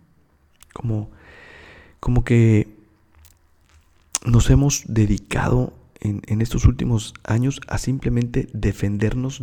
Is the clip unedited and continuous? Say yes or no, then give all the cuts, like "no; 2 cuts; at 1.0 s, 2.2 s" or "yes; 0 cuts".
yes; 0 cuts